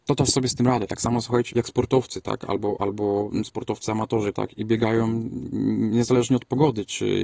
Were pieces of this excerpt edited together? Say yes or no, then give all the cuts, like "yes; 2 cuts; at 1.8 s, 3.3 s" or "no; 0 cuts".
yes; 2 cuts; at 1.5 s, 4.3 s